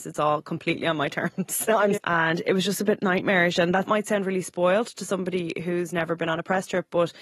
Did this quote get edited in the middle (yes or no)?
yes